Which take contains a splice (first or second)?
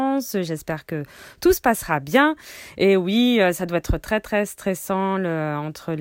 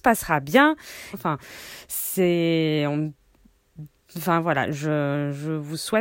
second